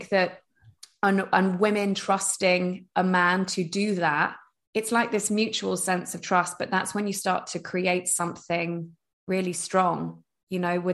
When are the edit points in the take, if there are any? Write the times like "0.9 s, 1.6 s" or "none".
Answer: none